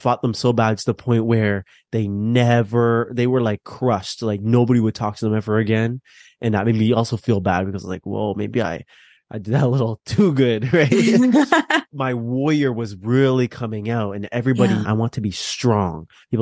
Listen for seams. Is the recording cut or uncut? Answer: cut